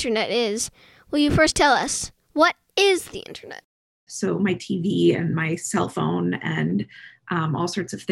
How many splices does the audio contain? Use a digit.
1